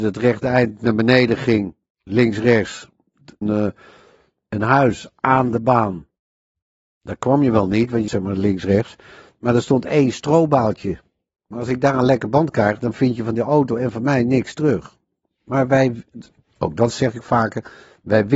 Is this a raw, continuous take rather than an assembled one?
no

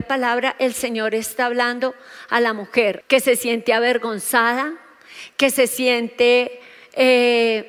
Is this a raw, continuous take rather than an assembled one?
no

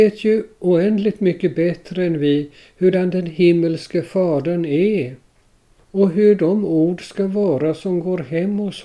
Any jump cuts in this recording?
no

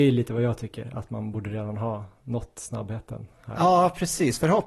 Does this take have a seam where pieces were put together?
no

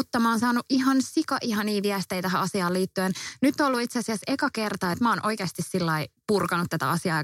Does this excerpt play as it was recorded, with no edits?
no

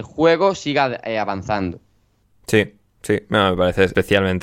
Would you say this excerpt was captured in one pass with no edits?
yes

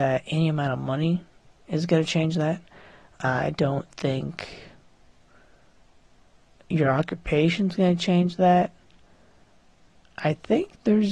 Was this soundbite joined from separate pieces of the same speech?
no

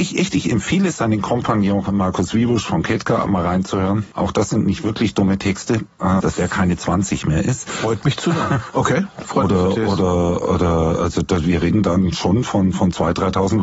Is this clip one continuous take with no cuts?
no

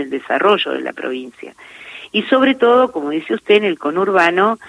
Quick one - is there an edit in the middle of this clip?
no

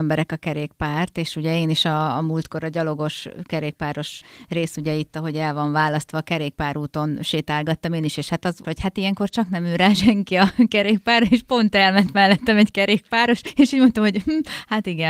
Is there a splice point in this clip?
yes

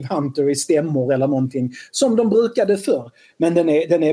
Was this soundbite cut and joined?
no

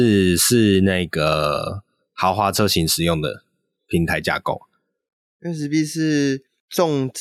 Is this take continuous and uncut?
yes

